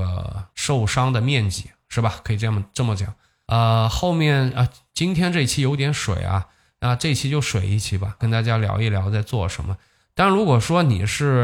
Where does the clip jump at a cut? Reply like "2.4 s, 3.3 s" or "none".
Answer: 8.2 s